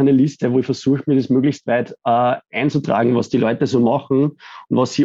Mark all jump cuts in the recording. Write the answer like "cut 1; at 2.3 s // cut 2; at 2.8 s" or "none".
none